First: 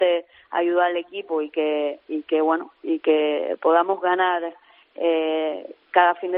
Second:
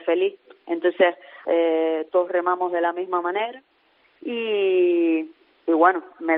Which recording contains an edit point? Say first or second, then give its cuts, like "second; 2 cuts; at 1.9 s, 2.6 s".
second; 1 cut; at 1.5 s